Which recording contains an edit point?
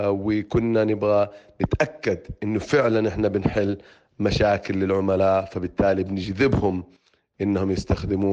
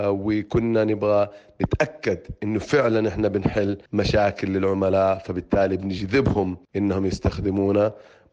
second; 2 cuts; at 3.9 s, 6.7 s

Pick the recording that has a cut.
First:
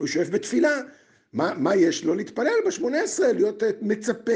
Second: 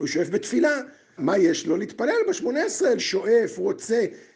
second; 2 cuts; at 1.2 s, 3.0 s

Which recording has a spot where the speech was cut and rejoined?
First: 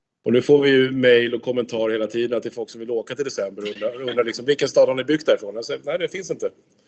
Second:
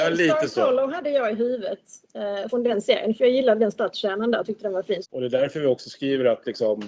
second; 2 cuts; at 2.5 s, 5.0 s

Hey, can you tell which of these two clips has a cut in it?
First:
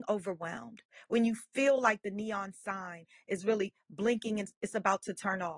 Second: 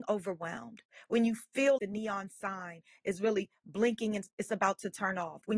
second; 1 cut; at 1.8 s

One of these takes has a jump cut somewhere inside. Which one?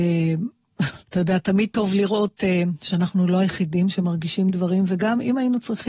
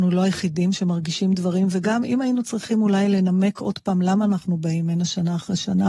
first; 1 cut; at 1.0 s

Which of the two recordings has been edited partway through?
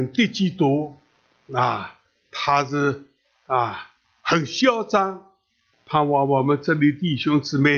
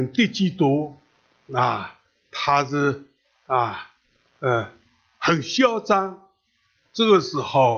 first; 2 cuts; at 4.0 s, 5.7 s

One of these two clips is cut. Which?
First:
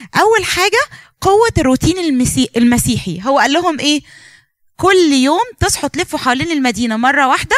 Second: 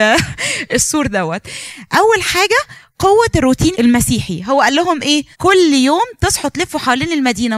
second; 2 cuts; at 3.7 s, 5.3 s

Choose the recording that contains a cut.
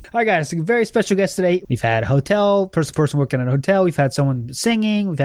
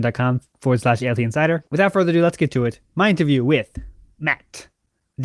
first; 1 cut; at 1.6 s

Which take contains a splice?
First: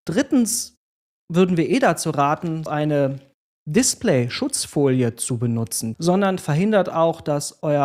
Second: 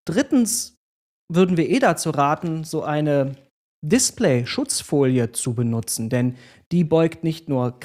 first; 2 cuts; at 2.7 s, 5.9 s

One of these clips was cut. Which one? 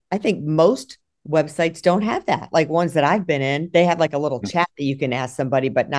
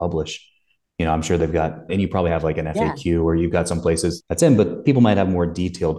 second; 1 cut; at 1.9 s

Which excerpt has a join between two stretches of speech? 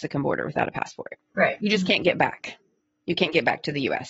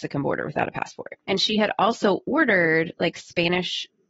second; 1 cut; at 1.2 s

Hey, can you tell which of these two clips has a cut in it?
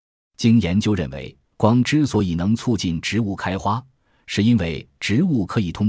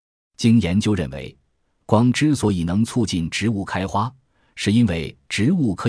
first; 1 cut; at 1.4 s

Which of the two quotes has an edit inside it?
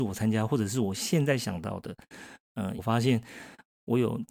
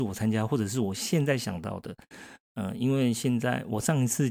first; 1 cut; at 2.8 s

